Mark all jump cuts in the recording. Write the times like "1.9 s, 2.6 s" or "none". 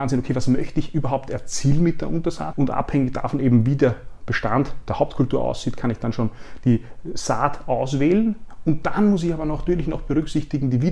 2.5 s